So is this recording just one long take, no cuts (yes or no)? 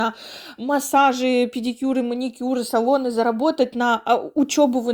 yes